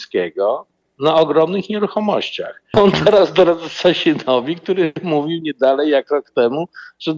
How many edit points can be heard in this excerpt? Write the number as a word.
one